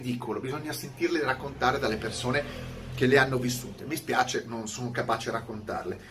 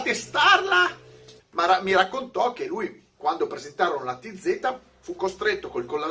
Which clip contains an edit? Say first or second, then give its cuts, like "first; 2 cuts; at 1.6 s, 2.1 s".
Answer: second; 1 cut; at 1.4 s